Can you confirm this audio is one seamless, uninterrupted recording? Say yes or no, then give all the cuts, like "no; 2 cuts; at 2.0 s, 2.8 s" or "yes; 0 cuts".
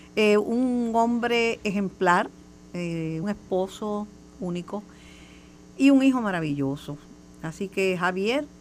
no; 1 cut; at 3.2 s